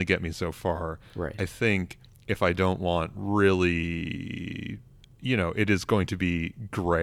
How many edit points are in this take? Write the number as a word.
zero